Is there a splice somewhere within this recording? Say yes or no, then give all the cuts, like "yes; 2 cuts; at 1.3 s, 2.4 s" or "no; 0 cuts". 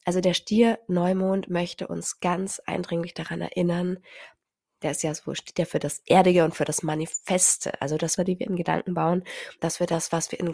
yes; 2 cuts; at 8.2 s, 9.6 s